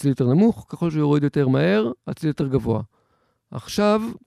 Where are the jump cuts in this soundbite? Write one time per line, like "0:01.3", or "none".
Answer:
none